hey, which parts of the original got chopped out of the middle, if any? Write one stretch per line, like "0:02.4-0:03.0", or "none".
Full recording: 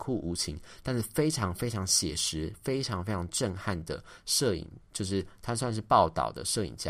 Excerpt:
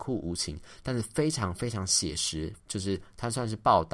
0:02.6-0:04.8